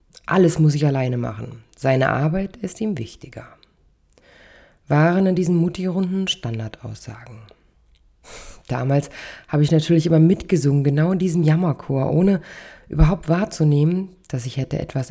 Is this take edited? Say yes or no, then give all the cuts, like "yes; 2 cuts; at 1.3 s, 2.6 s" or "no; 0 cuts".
no; 0 cuts